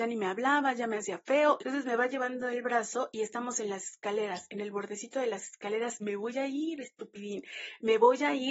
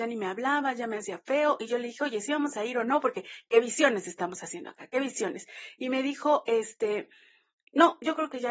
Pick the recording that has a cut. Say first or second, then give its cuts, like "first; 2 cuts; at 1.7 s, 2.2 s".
first; 2 cuts; at 1.6 s, 6.0 s